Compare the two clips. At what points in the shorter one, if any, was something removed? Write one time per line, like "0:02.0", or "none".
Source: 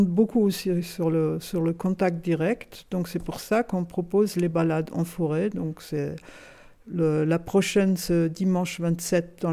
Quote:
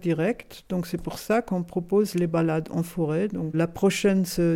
0:03.5